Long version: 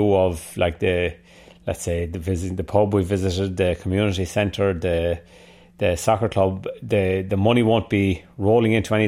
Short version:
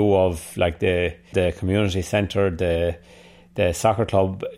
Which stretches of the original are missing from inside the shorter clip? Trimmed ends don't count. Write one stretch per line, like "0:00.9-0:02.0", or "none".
0:01.3-0:03.6